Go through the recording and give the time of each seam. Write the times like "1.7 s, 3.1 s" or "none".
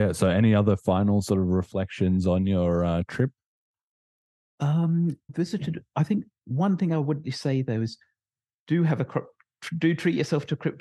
5.3 s, 7.2 s